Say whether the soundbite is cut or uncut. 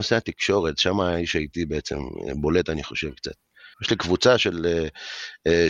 cut